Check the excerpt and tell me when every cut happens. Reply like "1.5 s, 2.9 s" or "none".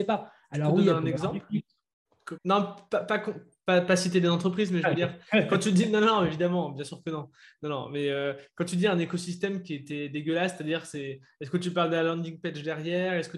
2.4 s